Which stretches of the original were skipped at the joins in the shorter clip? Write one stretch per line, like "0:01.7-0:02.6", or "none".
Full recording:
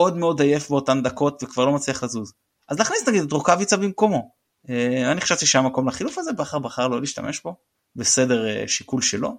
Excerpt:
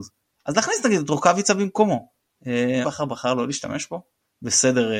0:05.0-0:06.4